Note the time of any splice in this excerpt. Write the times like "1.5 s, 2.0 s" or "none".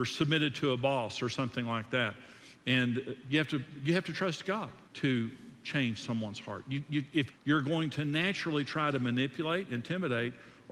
4.9 s, 7.3 s

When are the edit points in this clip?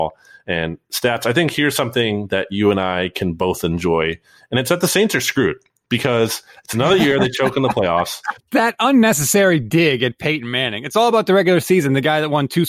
8.4 s

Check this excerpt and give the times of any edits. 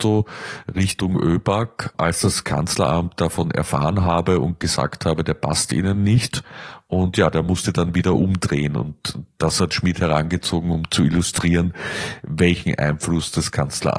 none

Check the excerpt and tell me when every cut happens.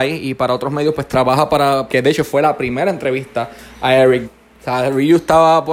1.9 s, 4.2 s

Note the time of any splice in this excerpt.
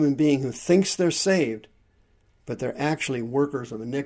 none

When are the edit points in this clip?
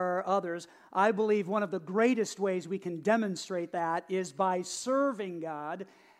none

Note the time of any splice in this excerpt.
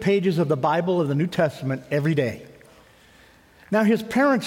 none

